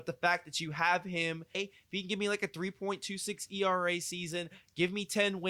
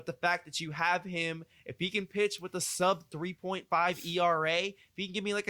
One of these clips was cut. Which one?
first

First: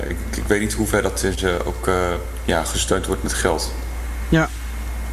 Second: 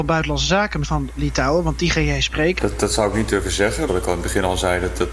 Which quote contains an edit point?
second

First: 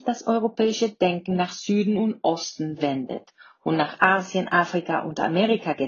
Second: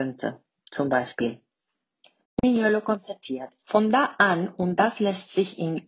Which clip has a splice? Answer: second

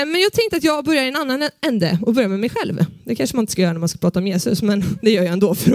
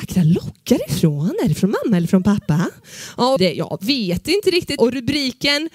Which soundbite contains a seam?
second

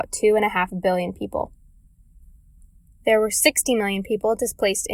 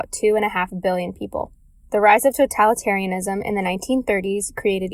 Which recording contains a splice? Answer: second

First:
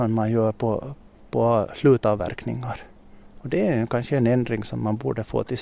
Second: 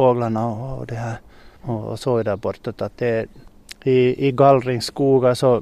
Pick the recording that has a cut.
second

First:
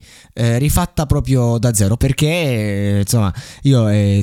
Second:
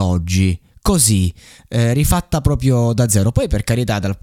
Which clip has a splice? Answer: first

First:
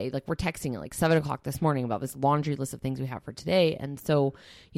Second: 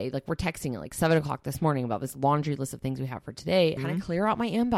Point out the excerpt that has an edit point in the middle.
second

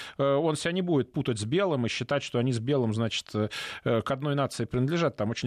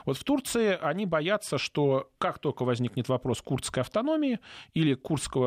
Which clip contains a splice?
second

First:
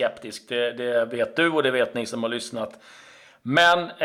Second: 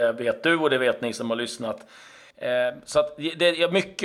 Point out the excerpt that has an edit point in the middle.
second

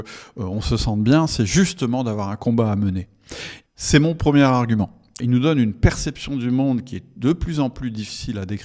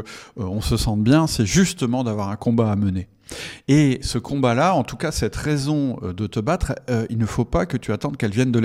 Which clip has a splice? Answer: first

